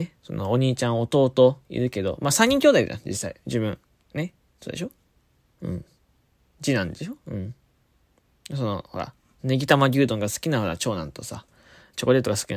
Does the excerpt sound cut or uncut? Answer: uncut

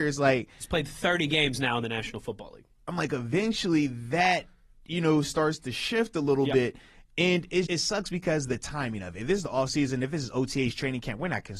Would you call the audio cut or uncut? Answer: cut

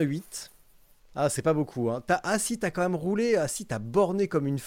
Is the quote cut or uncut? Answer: uncut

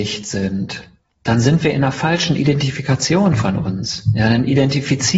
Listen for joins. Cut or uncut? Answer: uncut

